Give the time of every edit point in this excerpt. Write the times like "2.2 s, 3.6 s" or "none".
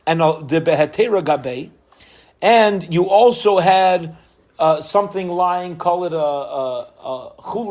none